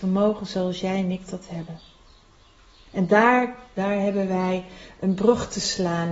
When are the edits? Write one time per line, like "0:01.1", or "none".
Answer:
0:03.8